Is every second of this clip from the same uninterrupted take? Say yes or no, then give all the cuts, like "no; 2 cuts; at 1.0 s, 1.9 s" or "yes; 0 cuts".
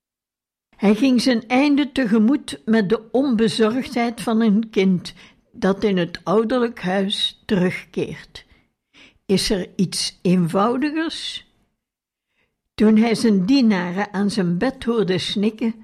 yes; 0 cuts